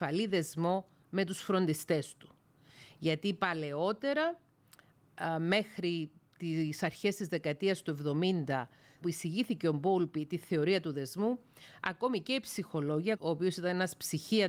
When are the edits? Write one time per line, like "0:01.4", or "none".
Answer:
0:09.0
0:13.1